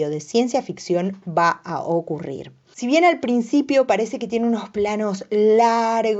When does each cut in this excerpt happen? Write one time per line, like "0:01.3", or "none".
0:02.6